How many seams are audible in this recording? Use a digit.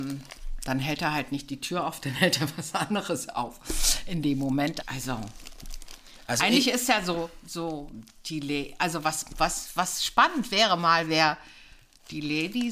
1